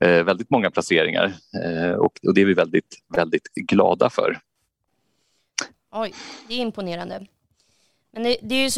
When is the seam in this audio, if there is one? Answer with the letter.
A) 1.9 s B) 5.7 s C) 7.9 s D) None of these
B